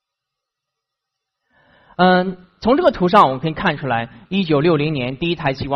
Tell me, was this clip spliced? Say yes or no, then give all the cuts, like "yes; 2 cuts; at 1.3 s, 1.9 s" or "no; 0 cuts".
no; 0 cuts